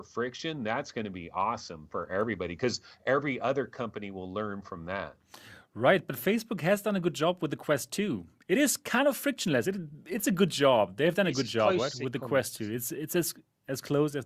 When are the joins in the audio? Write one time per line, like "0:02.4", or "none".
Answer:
none